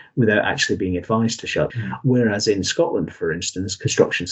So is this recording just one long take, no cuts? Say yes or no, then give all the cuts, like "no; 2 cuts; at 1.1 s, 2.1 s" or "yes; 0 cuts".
no; 1 cut; at 1.7 s